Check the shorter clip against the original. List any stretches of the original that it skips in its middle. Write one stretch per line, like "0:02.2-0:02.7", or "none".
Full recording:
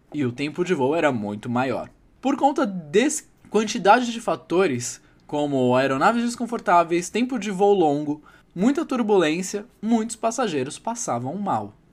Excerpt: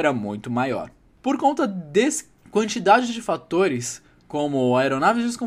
none